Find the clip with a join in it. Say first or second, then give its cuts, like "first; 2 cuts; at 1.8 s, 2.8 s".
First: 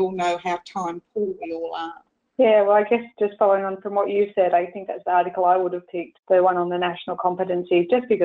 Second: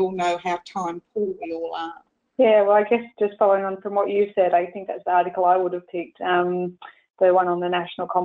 first; 1 cut; at 6.1 s